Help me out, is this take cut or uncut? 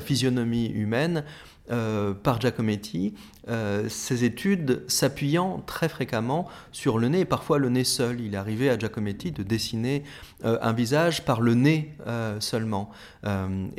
uncut